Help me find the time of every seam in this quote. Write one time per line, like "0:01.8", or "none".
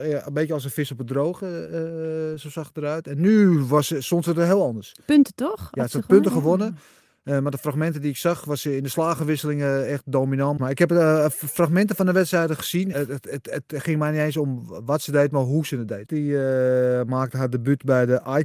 0:10.6
0:12.9
0:16.1